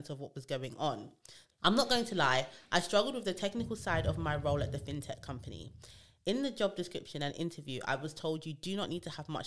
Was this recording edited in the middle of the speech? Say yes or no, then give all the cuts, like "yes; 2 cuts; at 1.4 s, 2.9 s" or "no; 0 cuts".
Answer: yes; 1 cut; at 1.5 s